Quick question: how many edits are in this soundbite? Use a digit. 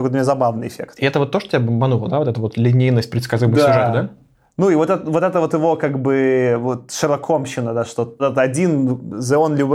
1